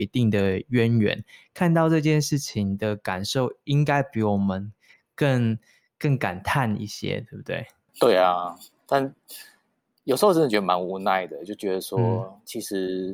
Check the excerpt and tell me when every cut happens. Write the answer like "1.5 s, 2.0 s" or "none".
7.9 s